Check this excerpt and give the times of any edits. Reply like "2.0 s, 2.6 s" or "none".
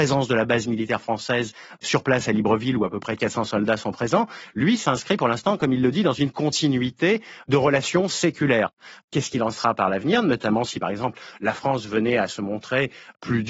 none

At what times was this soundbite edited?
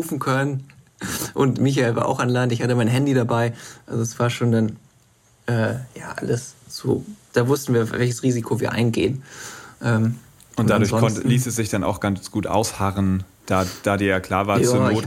6.6 s

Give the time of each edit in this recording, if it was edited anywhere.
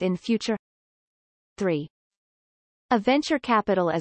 none

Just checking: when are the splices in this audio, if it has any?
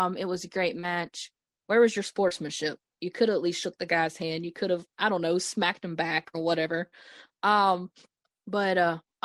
1.5 s

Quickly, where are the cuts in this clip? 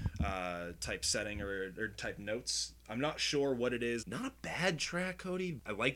4.0 s

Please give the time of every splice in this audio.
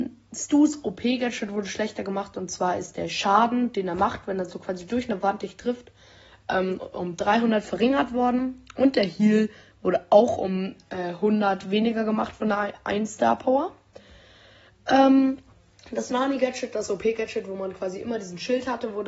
none

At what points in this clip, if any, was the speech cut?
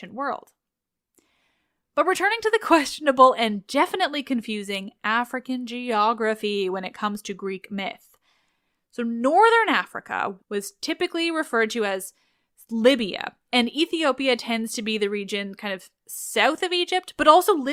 10.4 s

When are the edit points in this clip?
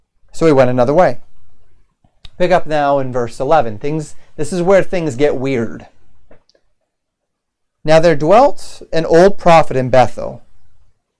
none

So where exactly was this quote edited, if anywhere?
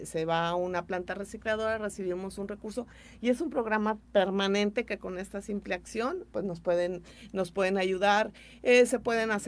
4.0 s

